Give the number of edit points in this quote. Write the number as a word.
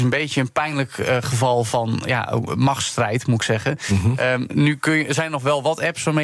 zero